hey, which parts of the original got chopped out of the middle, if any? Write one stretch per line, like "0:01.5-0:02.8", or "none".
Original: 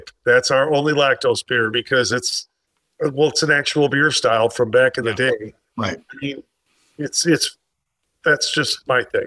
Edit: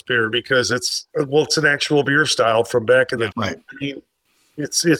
0:02.5-0:02.9
0:05.1-0:05.7